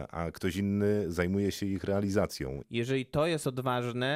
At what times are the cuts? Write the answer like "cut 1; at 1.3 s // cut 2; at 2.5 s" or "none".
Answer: cut 1; at 2.6 s

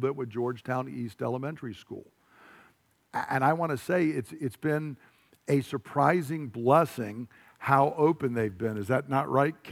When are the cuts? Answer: none

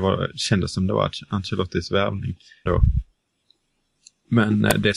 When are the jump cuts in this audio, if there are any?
cut 1; at 2.7 s

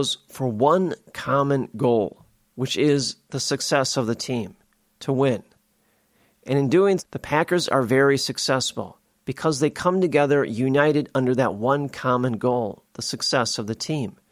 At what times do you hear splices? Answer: cut 1; at 7.0 s

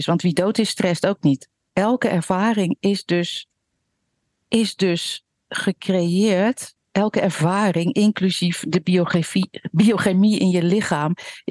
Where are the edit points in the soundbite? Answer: cut 1; at 1.7 s

